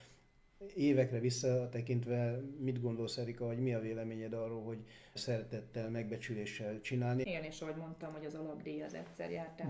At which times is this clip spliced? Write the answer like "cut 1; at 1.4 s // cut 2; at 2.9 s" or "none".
cut 1; at 5.2 s // cut 2; at 7.2 s